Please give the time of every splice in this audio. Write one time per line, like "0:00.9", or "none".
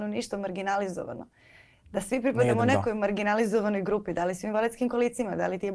none